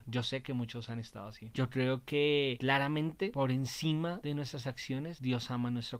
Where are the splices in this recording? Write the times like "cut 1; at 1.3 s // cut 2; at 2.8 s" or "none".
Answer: cut 1; at 1.5 s